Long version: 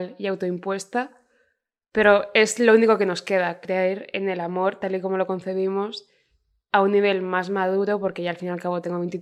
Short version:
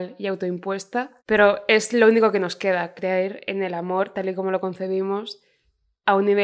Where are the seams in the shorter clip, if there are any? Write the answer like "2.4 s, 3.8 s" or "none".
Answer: 1.2 s